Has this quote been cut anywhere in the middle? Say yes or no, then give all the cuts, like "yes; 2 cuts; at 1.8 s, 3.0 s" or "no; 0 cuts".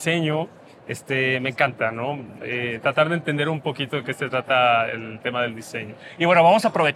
no; 0 cuts